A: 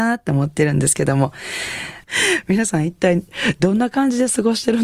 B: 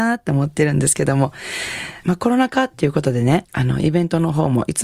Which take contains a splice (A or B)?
A